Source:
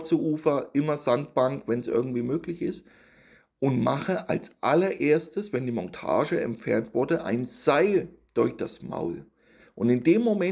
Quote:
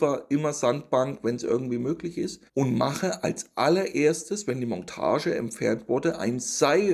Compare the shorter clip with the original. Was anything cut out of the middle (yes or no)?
yes